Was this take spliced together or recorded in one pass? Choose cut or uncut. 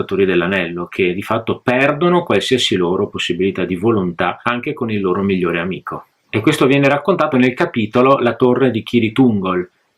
cut